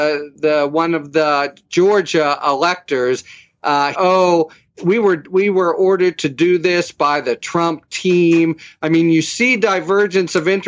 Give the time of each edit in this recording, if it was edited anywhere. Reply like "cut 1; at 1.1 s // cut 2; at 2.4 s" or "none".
cut 1; at 3.9 s